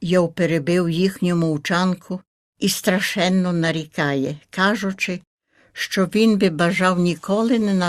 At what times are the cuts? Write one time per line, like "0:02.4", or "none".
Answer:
none